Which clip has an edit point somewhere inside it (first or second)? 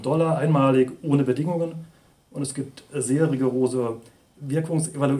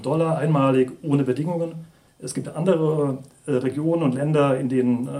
second